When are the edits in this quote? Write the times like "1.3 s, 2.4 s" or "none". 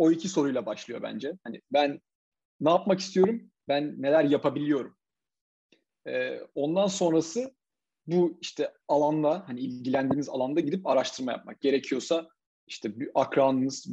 8.8 s